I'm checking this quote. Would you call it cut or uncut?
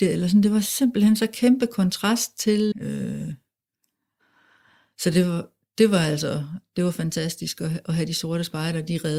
cut